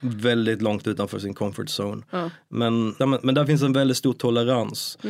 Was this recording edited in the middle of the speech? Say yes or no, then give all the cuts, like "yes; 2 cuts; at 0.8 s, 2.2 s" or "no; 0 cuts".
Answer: yes; 1 cut; at 3.0 s